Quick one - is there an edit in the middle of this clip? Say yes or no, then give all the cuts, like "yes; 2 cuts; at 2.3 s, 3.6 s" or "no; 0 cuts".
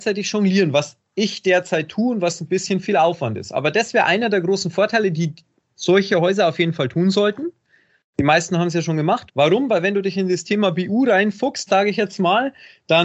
yes; 2 cuts; at 9.3 s, 11.7 s